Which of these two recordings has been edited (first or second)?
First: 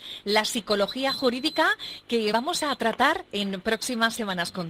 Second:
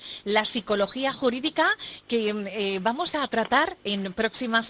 first